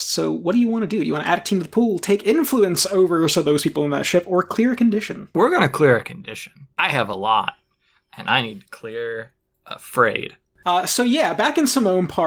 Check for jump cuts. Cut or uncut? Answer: uncut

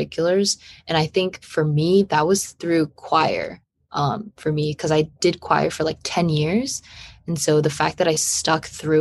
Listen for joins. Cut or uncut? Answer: uncut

